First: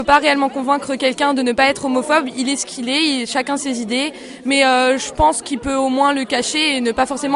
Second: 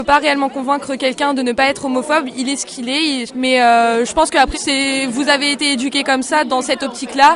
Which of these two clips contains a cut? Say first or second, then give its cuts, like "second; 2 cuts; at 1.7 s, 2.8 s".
second; 2 cuts; at 3.3 s, 4.5 s